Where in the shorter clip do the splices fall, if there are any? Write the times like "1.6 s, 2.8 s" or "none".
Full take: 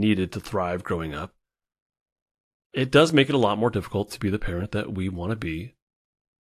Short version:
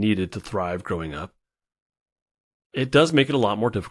none